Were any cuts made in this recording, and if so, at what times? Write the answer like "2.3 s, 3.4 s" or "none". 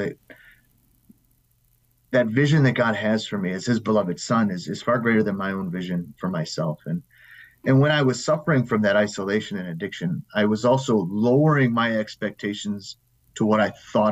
none